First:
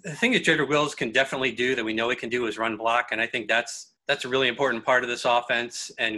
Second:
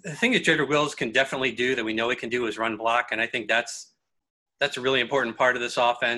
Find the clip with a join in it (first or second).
first